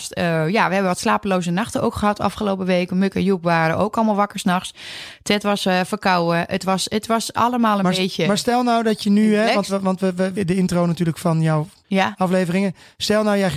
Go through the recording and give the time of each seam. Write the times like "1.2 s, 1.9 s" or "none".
10.4 s, 11.8 s